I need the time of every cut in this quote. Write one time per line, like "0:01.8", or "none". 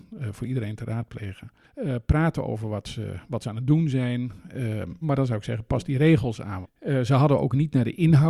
0:05.0
0:06.6